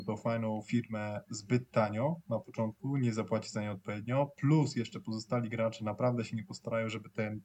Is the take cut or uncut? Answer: uncut